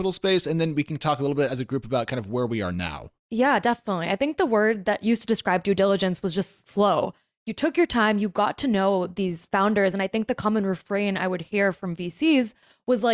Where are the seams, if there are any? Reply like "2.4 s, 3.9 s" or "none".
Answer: none